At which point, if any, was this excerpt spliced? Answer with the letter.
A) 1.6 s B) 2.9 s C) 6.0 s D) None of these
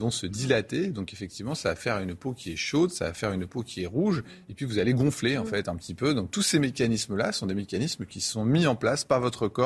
D